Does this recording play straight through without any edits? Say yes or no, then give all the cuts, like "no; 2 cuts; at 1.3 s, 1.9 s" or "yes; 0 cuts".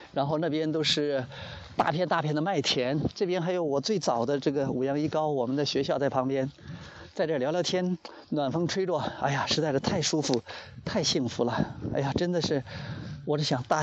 yes; 0 cuts